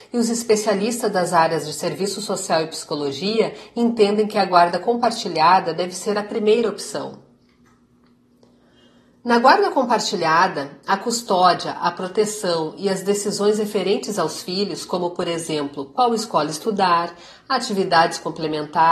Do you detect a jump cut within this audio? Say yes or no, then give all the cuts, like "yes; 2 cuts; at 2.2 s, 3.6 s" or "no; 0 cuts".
no; 0 cuts